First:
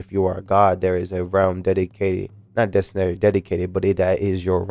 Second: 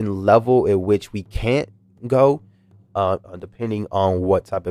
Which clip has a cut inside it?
second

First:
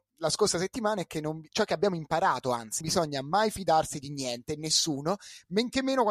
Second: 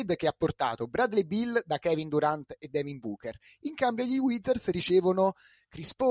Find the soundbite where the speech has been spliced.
first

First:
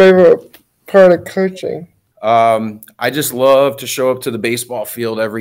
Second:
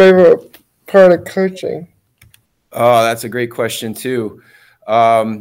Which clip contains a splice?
first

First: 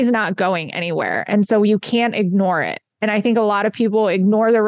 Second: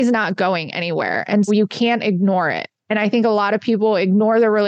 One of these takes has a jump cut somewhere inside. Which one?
second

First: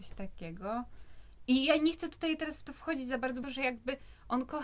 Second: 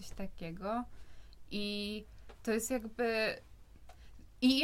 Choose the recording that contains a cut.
first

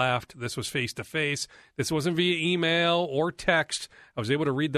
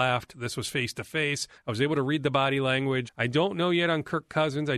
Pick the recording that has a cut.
second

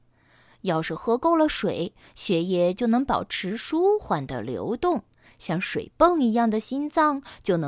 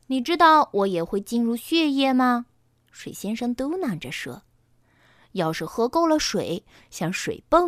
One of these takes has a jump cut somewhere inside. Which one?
second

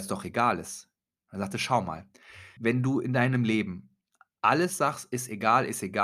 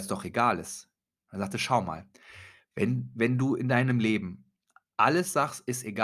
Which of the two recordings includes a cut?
first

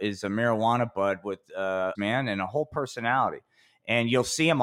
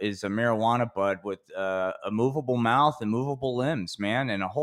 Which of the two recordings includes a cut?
first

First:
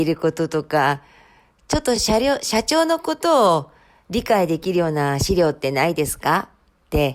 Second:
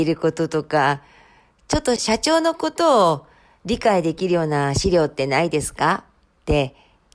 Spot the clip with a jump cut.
second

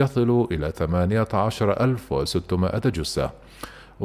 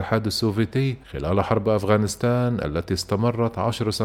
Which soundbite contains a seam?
second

